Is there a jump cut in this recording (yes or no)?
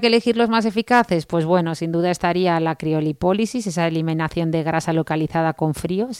no